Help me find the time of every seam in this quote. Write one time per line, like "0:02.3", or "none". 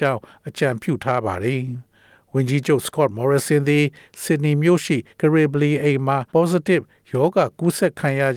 0:05.1
0:06.3